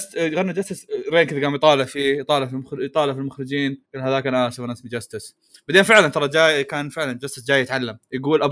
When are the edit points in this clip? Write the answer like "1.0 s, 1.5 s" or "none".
3.9 s